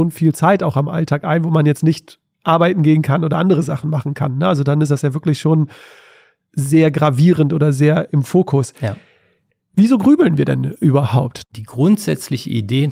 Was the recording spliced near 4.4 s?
no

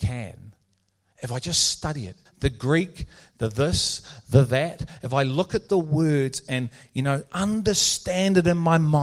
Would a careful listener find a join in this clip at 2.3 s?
yes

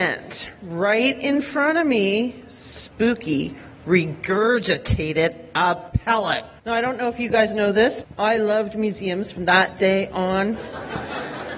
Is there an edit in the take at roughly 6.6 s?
yes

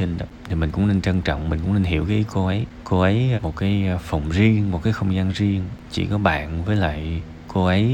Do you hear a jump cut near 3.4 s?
yes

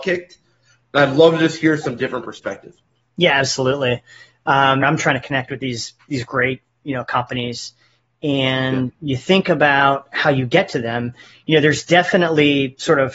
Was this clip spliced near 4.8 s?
yes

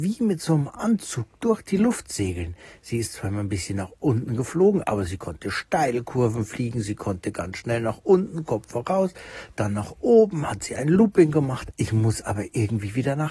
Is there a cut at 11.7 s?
yes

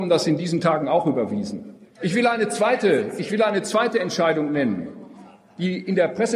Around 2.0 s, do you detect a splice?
yes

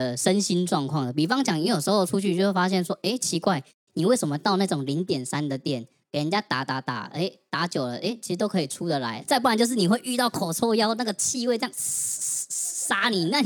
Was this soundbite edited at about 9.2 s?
yes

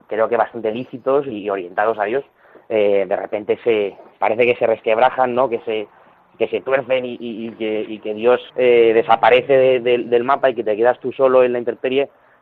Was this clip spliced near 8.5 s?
yes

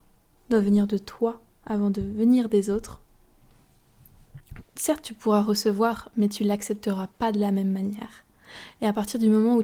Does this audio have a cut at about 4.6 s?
yes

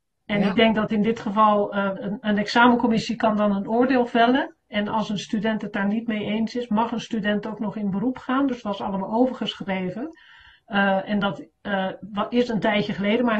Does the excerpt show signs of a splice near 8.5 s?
yes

